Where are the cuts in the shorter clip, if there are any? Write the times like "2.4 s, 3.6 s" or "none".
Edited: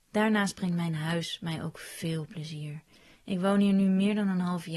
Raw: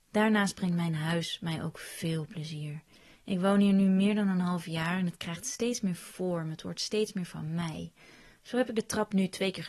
none